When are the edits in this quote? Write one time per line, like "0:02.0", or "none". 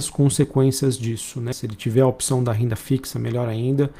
0:01.5